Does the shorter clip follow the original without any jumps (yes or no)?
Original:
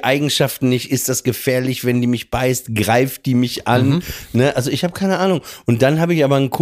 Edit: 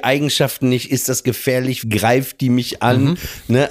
no